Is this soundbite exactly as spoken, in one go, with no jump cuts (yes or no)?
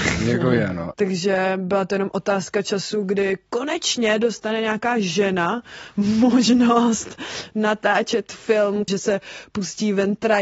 no